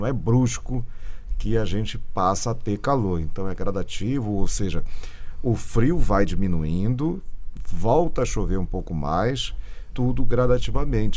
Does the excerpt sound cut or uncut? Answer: cut